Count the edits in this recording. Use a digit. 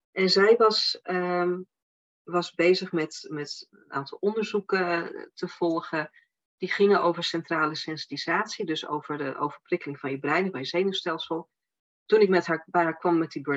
0